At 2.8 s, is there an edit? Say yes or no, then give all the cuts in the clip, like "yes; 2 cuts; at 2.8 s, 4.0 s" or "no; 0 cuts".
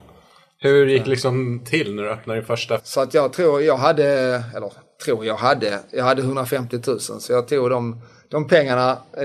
yes; 1 cut; at 2.8 s